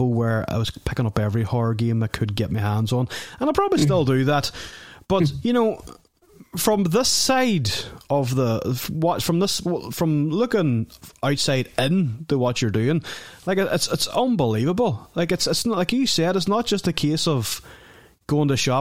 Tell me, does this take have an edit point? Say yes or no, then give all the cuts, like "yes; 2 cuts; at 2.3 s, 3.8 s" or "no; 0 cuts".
no; 0 cuts